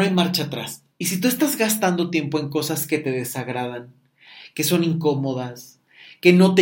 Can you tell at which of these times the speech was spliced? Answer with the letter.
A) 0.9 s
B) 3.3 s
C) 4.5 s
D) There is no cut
A